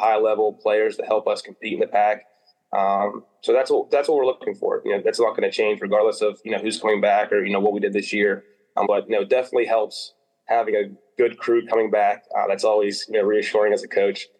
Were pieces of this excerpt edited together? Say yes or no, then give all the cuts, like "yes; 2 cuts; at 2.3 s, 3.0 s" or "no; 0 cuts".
yes; 1 cut; at 8.8 s